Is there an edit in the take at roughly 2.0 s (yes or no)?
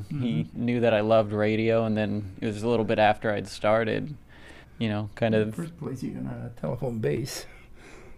no